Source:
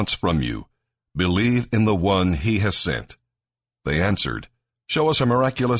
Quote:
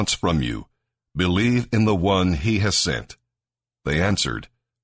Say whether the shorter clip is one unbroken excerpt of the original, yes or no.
yes